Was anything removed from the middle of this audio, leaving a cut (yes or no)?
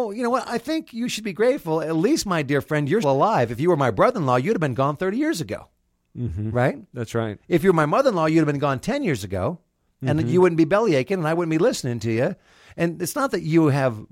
yes